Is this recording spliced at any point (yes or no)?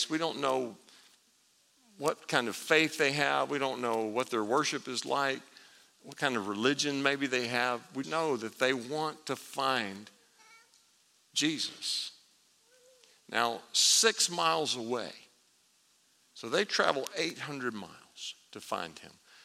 yes